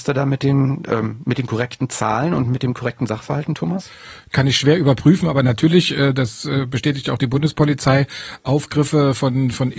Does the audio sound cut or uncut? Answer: uncut